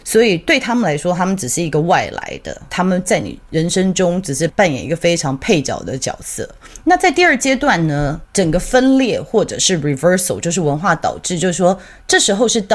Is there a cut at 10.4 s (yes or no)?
no